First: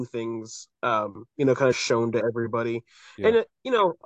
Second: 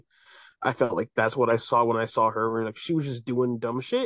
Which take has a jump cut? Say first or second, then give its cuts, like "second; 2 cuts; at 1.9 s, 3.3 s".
first; 1 cut; at 1.7 s